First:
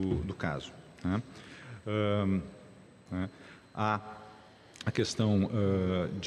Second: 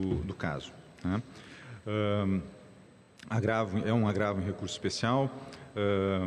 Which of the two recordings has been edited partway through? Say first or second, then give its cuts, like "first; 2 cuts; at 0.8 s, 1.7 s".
first; 1 cut; at 3.0 s